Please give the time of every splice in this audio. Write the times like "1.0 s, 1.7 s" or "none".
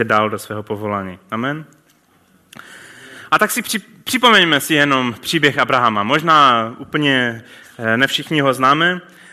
none